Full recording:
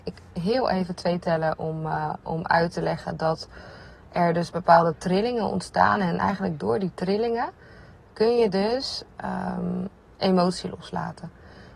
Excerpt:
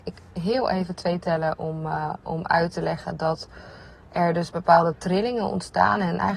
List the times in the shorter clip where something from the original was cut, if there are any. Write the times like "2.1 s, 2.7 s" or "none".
none